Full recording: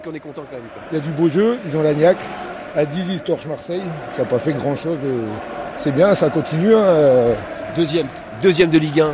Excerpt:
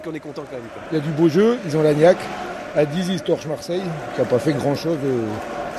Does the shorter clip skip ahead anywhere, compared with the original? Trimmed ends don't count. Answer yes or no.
no